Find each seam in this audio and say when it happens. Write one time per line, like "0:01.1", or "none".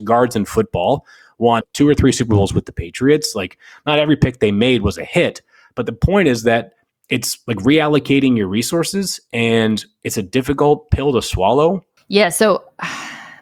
0:01.6
0:12.0